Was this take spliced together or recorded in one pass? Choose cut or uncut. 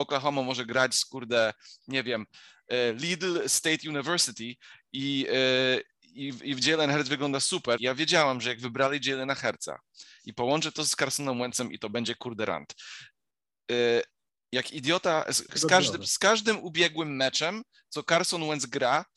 cut